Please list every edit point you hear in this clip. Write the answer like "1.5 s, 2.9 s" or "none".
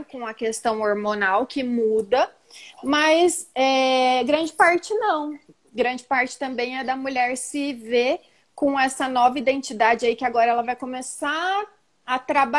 none